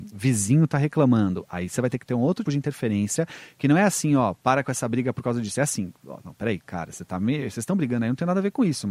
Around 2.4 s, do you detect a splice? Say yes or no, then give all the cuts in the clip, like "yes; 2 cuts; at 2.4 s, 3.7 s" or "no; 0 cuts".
yes; 1 cut; at 2.4 s